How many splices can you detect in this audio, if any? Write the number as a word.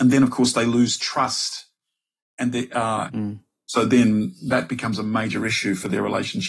one